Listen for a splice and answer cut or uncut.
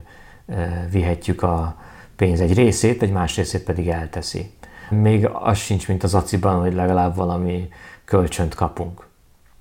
cut